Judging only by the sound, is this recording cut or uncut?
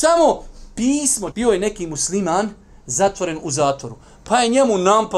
cut